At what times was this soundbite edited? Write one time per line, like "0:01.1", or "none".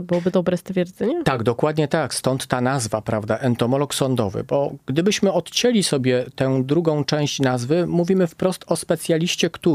none